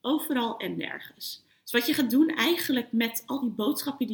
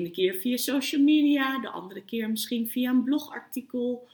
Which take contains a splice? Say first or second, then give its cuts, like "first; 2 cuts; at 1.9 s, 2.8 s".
first; 1 cut; at 1.5 s